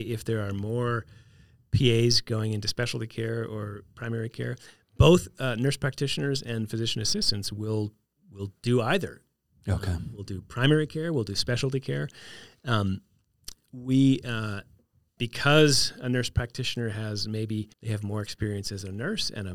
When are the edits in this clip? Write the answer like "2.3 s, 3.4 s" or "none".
15.2 s, 17.7 s

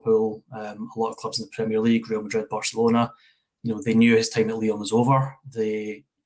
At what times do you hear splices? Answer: none

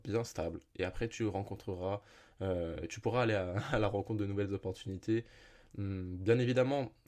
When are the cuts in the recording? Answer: none

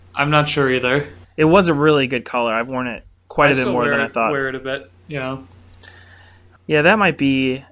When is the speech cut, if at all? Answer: 6.6 s

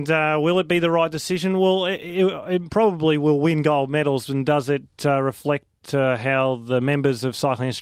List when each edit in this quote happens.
none

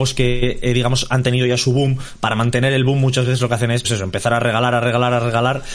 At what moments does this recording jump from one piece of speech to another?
3.8 s

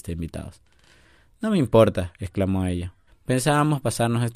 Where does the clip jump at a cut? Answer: 3.1 s

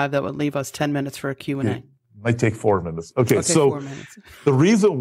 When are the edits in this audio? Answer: none

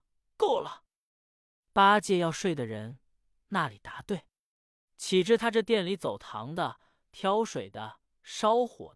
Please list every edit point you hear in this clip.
none

